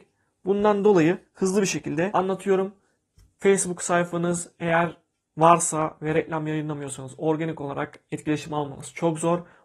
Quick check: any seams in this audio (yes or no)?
no